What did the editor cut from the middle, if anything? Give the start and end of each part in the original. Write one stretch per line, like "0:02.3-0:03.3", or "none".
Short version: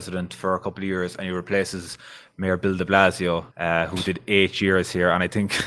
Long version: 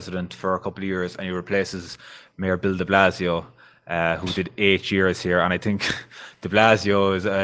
0:03.5-0:03.8